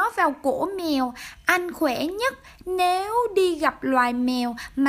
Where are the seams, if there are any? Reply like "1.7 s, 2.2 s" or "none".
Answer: none